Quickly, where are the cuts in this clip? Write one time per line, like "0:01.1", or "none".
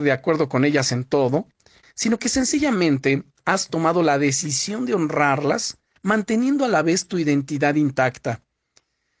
0:01.8
0:06.0

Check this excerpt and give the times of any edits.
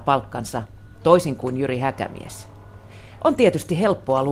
0:03.2

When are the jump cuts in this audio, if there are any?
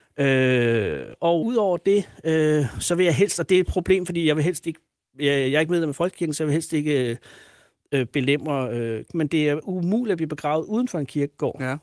0:01.4
0:09.1

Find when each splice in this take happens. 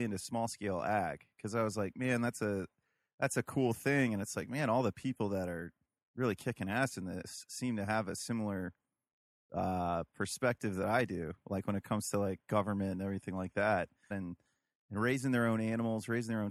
0:14.1

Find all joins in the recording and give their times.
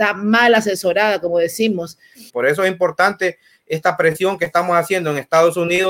0:02.3

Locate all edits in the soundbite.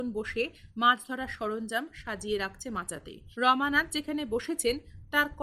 0:03.3

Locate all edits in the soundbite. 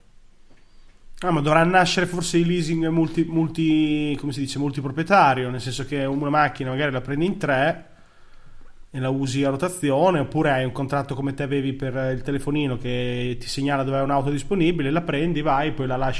none

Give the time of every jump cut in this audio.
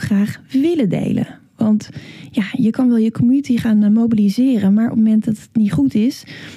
none

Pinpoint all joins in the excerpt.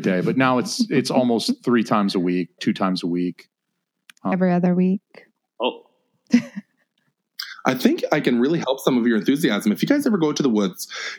0:02.6
0:04.3

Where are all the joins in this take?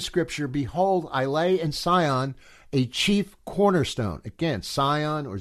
none

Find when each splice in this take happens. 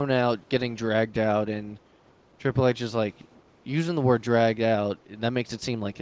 none

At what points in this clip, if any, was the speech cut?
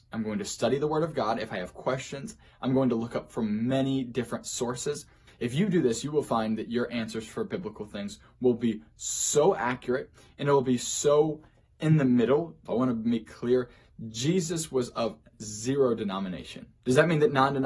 0:05.3
0:12.7

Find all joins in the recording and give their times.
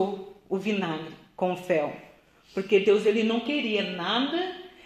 none

